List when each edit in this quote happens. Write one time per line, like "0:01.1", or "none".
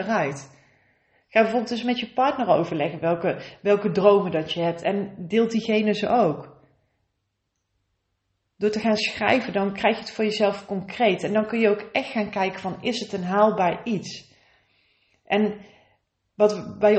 none